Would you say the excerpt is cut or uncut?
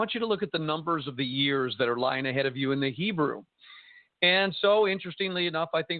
uncut